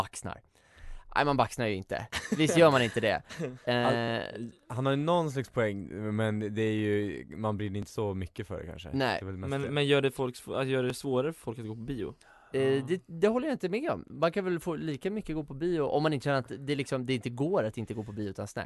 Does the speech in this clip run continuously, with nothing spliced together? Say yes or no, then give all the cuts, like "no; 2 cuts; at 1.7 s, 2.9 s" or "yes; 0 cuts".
yes; 0 cuts